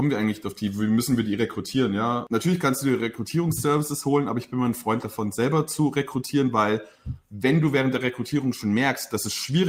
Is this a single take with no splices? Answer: yes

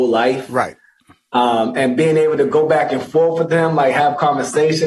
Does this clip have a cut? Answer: no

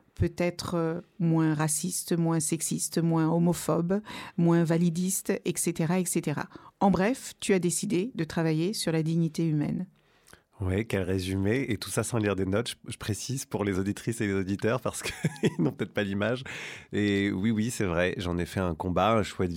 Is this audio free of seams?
yes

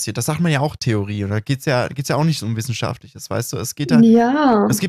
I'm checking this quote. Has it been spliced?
no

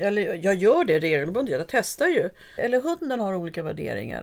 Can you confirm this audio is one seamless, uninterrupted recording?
no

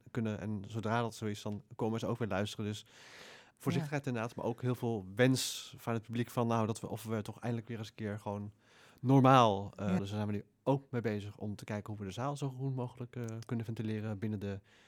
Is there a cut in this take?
yes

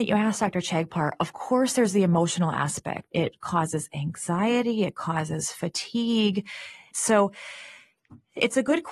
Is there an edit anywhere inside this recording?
yes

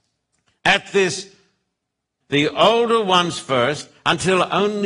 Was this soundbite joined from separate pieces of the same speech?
yes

